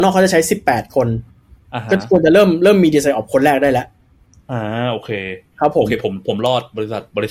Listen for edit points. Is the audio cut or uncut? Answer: uncut